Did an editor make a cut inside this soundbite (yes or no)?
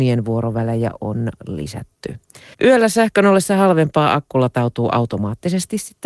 yes